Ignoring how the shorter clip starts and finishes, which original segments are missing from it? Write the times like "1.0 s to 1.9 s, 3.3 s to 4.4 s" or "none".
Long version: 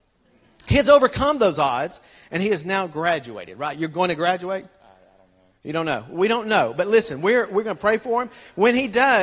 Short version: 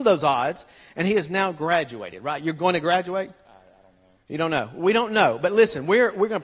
none